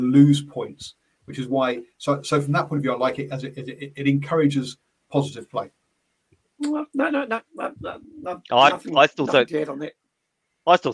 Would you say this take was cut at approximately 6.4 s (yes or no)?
yes